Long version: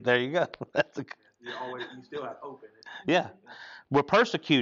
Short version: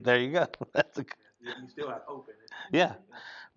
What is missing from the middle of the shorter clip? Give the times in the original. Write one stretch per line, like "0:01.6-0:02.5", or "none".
0:01.5-0:01.9